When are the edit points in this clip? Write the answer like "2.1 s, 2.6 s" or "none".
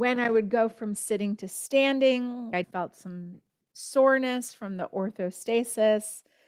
2.6 s